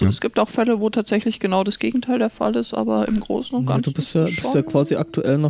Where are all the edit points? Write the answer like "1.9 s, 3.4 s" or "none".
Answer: none